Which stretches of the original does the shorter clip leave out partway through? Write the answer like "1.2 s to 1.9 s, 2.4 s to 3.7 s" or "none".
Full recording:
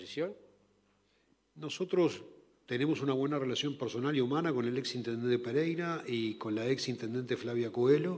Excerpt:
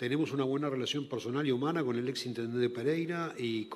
none